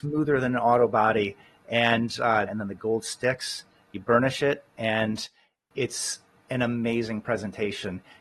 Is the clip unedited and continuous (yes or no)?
no